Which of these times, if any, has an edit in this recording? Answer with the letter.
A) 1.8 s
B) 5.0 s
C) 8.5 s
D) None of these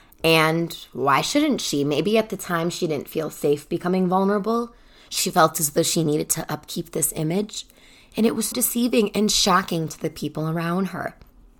C